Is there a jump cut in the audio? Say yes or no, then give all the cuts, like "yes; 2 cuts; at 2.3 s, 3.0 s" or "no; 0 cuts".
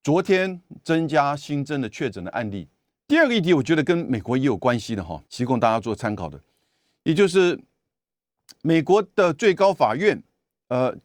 yes; 2 cuts; at 3.0 s, 5.2 s